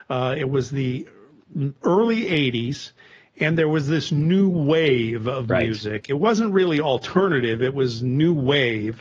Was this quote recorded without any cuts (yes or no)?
yes